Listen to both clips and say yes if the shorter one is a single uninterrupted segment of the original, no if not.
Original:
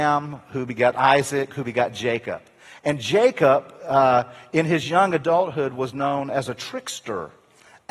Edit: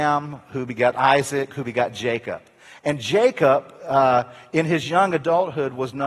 yes